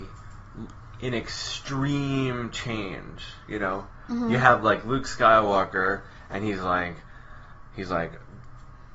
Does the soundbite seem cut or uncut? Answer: uncut